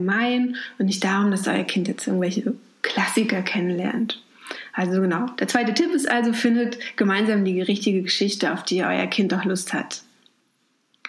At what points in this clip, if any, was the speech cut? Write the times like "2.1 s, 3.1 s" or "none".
none